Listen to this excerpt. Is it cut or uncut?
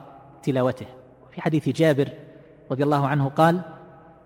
uncut